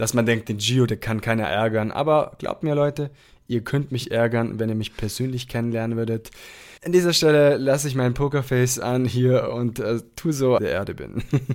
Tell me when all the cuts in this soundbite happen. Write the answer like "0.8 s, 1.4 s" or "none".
6.8 s, 10.6 s